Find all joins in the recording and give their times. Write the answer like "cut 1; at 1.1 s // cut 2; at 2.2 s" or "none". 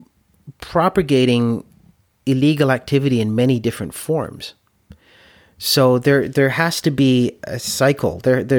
none